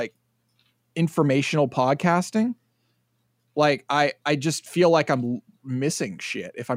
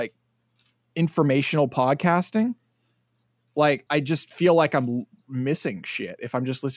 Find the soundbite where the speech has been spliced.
second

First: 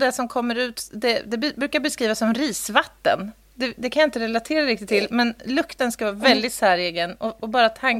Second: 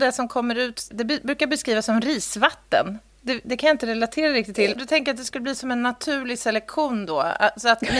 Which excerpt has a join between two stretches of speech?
second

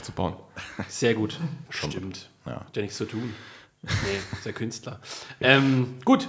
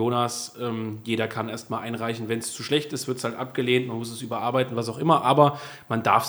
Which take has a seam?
first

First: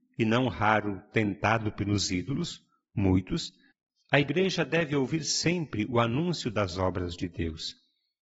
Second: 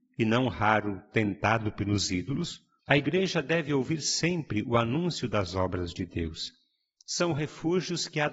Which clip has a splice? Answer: second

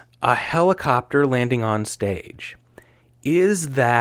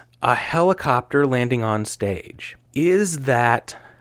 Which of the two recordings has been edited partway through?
second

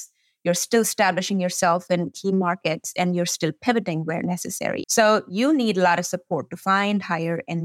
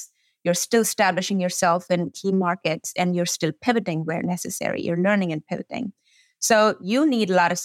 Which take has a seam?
first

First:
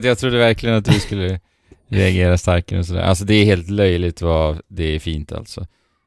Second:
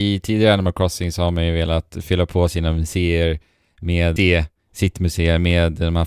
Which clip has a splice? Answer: second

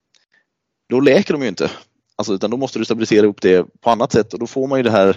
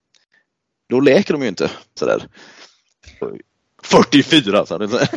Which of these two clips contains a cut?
second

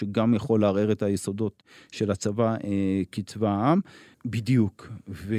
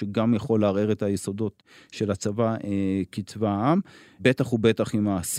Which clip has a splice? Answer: first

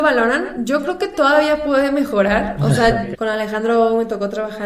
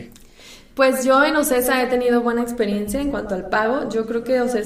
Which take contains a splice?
first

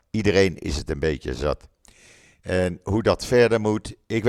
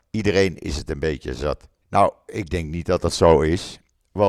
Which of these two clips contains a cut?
second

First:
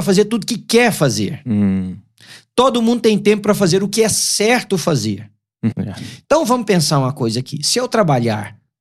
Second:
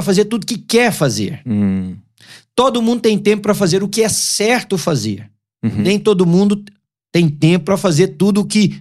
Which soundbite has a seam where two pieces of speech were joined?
first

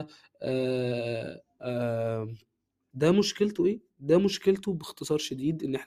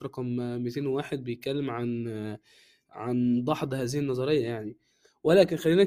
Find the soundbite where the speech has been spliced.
first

